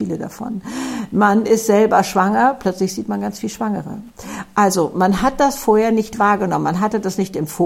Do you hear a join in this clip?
no; 0 cuts

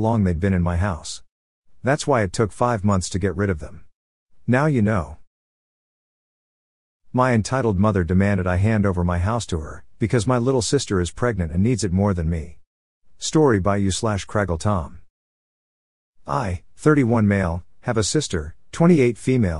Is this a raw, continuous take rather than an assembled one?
yes; 0 cuts

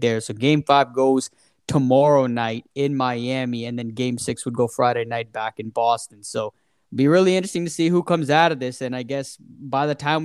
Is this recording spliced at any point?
no; 0 cuts

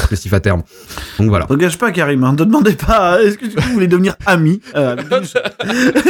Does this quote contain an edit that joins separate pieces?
no; 0 cuts

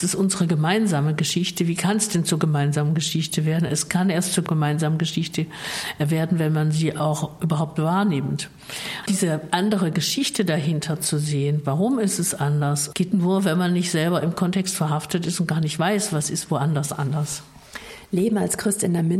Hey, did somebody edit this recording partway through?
no; 0 cuts

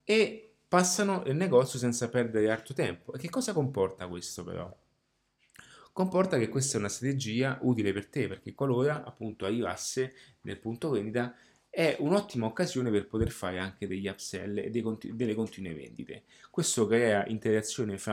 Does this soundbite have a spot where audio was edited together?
no; 0 cuts

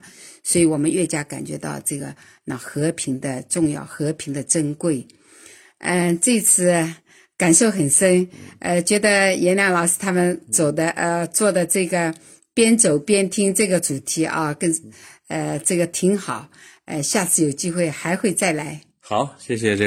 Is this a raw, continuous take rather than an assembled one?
yes; 0 cuts

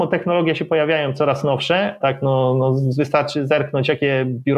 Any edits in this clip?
yes; 1 cut; at 2.0 s

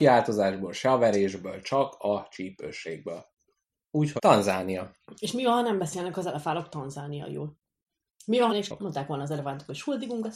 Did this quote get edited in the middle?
yes; 2 cuts; at 4.2 s, 8.5 s

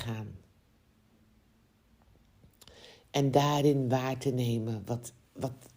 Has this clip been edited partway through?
no; 0 cuts

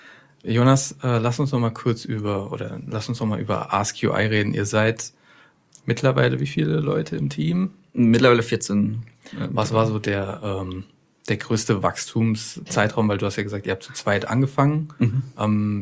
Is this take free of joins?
yes; 0 cuts

